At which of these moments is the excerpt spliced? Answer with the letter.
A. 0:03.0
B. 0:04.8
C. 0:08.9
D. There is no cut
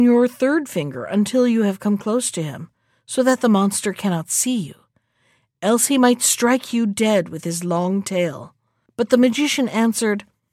C